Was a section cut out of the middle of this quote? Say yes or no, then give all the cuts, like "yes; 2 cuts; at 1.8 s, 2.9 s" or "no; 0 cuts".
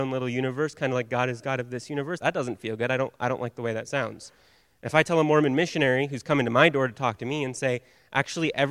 yes; 1 cut; at 2.2 s